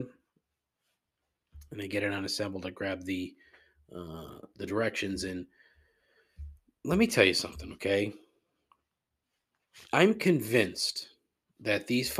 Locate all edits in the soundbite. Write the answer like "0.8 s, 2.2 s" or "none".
none